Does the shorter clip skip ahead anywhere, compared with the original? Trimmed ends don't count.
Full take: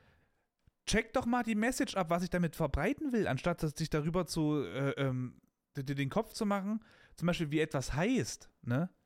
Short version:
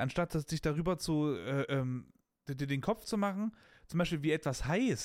no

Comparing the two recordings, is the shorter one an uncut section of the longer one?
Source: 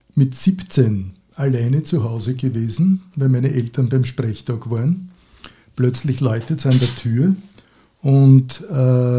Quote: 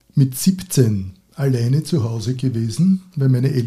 yes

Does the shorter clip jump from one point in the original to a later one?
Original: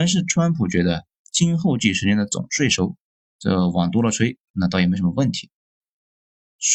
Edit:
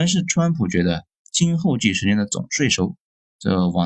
no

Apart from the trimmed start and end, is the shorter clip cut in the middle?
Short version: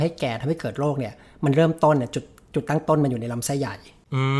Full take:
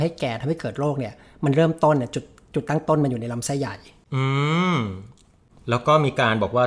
no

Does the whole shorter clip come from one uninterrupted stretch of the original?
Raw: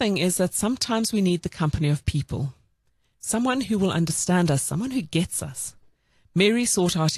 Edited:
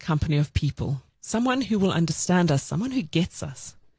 no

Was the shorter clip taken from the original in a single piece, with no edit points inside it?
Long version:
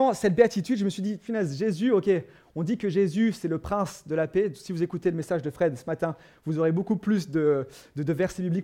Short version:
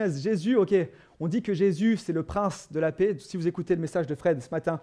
yes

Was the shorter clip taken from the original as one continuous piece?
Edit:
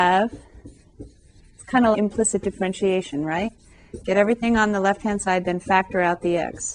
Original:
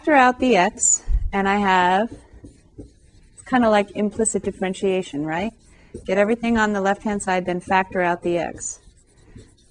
no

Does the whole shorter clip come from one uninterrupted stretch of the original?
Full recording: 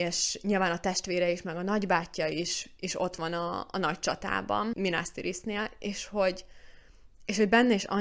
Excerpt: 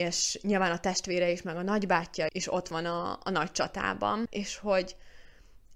no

